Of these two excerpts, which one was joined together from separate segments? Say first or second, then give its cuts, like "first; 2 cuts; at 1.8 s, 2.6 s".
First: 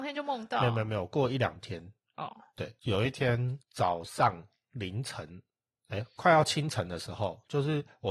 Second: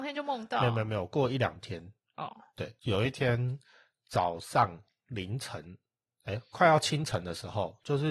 first; 1 cut; at 3.6 s